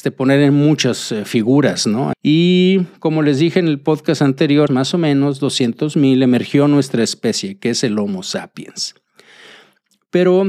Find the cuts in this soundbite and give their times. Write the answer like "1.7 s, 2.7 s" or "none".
2.1 s, 4.7 s